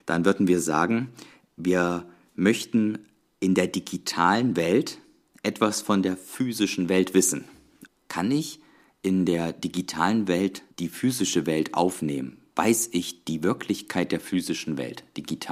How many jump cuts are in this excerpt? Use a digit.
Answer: 2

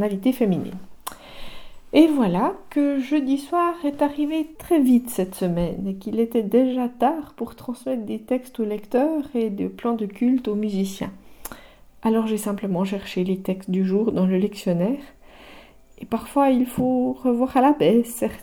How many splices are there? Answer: 1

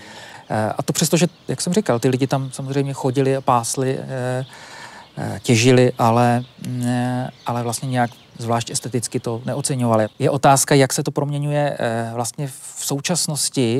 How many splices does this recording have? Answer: 0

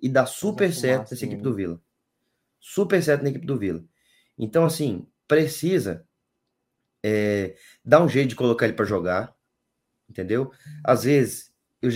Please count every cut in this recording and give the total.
0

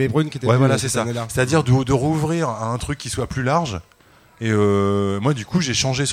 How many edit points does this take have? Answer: 0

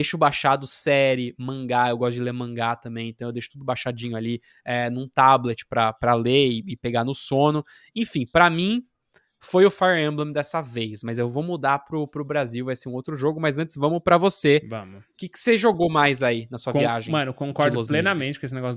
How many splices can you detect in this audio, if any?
0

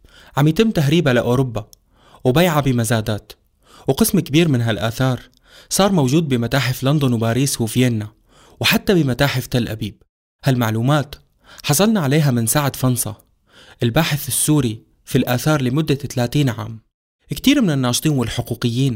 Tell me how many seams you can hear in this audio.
0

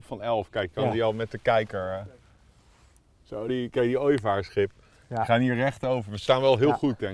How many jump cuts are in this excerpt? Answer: 1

